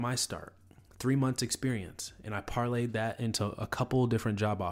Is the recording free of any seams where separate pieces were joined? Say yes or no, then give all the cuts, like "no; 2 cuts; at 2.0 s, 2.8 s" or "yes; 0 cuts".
yes; 0 cuts